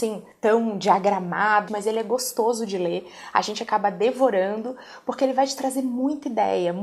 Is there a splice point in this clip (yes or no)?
yes